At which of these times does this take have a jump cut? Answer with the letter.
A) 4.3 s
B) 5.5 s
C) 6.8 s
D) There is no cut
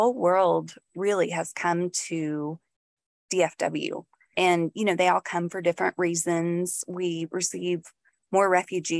A